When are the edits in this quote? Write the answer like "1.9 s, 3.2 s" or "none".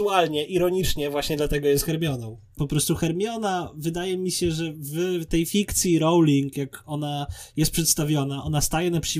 2.6 s